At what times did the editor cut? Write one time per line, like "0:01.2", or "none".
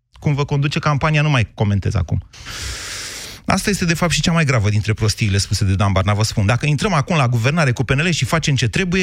none